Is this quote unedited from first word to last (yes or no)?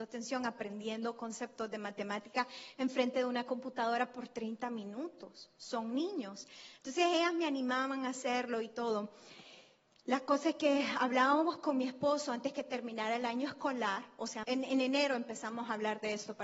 no